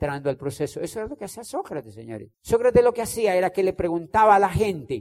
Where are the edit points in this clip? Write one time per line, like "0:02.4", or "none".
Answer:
0:02.3